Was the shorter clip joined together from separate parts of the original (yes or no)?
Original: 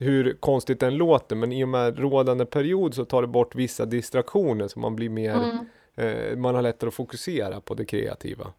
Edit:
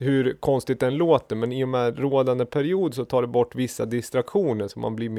no